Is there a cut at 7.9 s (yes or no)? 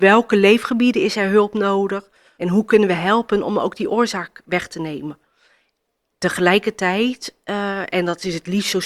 no